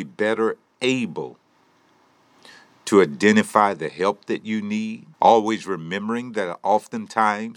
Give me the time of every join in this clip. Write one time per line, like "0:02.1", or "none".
0:05.1